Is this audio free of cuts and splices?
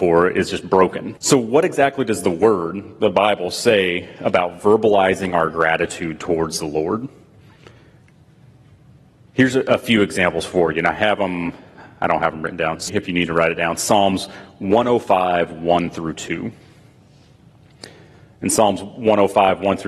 no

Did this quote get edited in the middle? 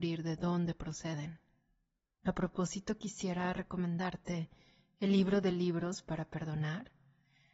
yes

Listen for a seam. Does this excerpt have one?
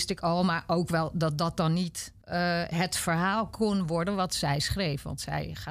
yes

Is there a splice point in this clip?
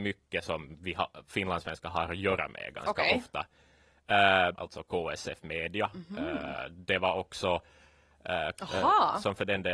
yes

